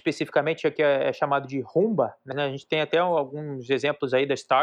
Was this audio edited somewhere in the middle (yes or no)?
yes